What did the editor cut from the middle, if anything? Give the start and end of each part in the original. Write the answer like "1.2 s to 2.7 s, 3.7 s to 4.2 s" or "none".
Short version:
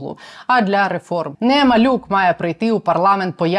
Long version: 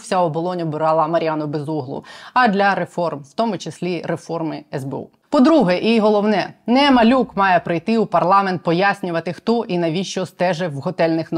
3.2 s to 6.6 s